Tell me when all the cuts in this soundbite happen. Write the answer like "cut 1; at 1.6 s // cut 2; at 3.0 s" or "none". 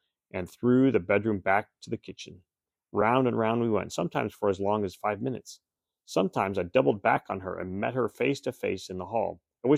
none